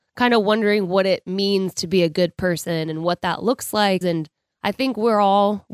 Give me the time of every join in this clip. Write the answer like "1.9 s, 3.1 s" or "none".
4.0 s